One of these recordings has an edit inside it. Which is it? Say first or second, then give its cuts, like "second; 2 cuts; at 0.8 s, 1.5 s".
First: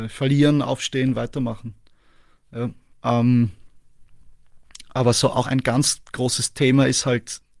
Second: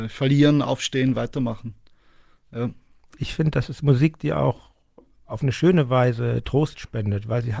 first; 2 cuts; at 2.9 s, 5.4 s